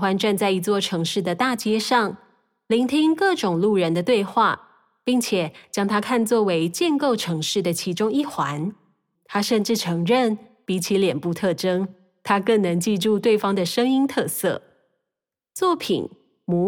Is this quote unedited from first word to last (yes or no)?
no